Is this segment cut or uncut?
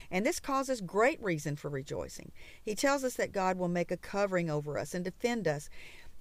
uncut